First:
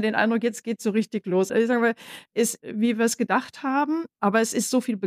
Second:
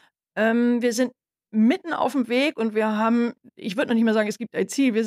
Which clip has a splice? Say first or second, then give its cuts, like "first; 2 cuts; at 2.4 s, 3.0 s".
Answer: first; 2 cuts; at 1.5 s, 2.6 s